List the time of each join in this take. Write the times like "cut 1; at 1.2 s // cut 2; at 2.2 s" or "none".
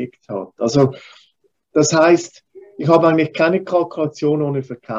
none